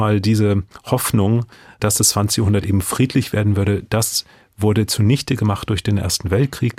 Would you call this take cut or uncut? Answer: uncut